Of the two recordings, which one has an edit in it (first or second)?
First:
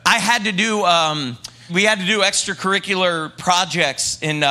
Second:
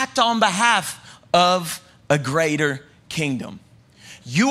first